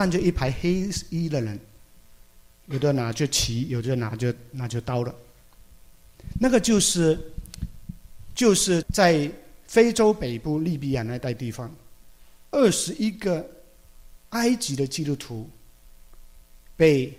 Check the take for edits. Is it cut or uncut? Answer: cut